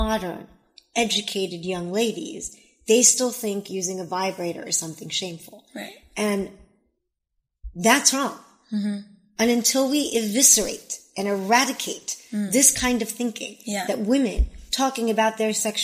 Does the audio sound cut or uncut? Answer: uncut